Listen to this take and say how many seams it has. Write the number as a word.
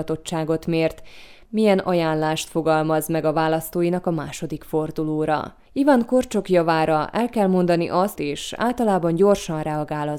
two